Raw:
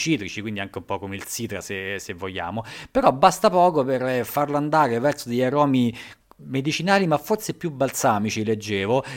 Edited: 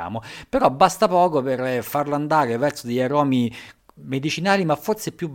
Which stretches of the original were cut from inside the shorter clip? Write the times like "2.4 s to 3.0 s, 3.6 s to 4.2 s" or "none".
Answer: none